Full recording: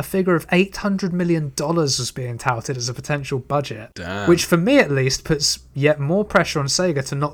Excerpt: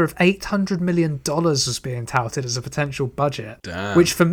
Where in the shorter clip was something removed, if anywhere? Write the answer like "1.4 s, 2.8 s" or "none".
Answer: none